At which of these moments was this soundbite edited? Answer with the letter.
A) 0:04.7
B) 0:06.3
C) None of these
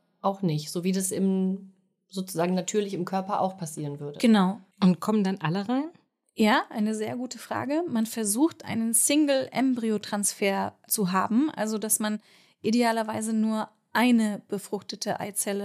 A